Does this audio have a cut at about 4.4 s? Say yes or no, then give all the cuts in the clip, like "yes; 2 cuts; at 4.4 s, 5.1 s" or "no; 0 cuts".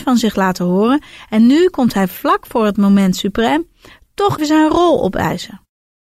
yes; 1 cut; at 4.4 s